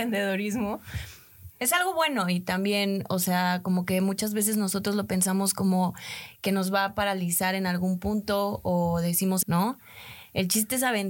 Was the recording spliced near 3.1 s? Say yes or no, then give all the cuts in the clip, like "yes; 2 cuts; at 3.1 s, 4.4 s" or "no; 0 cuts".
no; 2 cuts; at 1.5 s, 9.4 s